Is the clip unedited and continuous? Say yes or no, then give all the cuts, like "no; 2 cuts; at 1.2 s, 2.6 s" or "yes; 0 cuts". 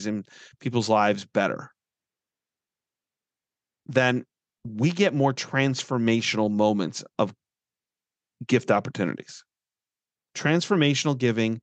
no; 1 cut; at 10.1 s